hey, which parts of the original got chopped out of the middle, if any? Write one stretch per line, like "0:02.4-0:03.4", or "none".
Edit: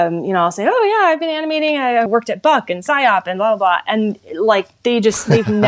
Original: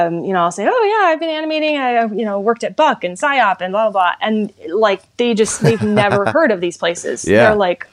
0:02.1-0:02.4